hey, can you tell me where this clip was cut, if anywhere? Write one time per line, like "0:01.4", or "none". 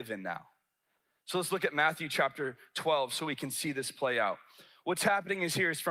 none